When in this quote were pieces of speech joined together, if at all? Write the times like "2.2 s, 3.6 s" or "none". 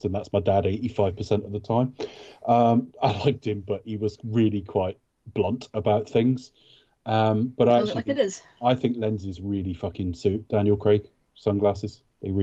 none

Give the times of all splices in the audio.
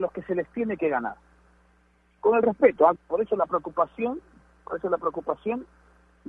3.0 s

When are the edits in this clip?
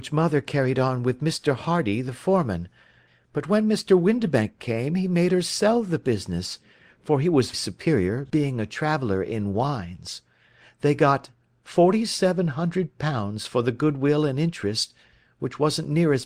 7.5 s

